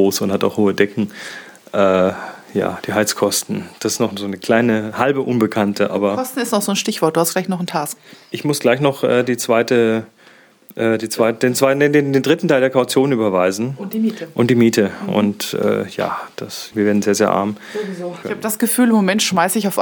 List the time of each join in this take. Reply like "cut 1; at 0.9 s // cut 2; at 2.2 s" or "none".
cut 1; at 16.7 s // cut 2; at 18.2 s